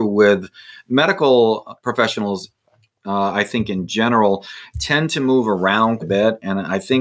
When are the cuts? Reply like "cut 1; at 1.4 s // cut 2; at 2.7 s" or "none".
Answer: cut 1; at 6.0 s